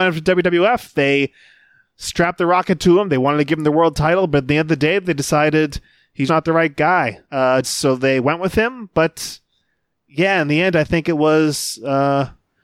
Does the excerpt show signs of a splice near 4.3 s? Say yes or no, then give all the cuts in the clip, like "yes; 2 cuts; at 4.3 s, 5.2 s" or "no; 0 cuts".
no; 2 cuts; at 6.3 s, 7.6 s